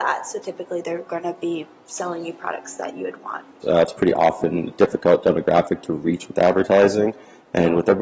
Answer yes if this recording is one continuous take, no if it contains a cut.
no